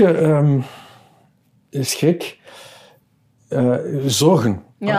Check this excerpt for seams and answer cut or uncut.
uncut